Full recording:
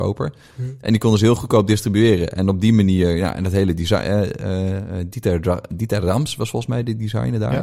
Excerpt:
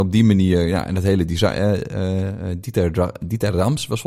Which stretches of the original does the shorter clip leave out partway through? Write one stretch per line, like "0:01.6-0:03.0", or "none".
none

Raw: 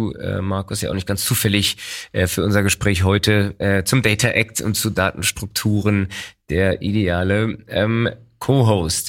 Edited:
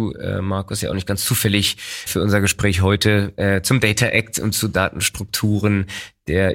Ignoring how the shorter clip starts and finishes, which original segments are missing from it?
0:02.1-0:02.3

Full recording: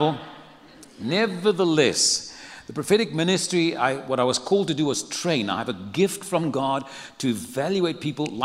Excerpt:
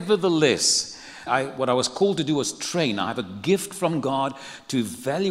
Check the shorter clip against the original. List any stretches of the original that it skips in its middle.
0:02.6-0:03.8

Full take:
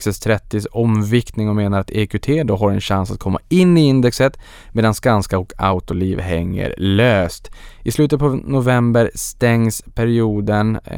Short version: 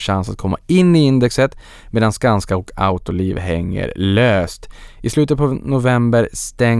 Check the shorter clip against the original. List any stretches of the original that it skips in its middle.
none

